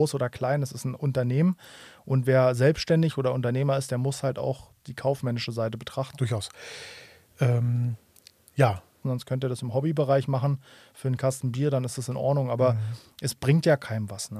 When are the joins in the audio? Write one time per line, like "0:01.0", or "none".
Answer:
0:06.1
0:09.0